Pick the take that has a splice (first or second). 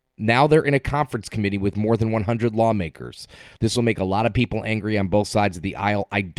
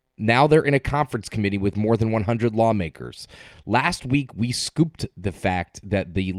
first